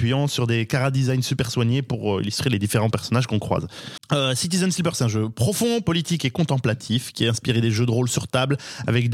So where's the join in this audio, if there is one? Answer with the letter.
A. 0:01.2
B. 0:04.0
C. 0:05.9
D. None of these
B